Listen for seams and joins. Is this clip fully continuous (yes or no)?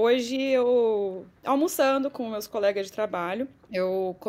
yes